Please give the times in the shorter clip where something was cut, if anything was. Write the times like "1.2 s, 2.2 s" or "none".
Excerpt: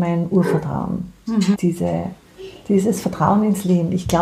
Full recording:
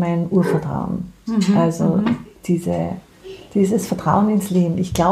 1.5 s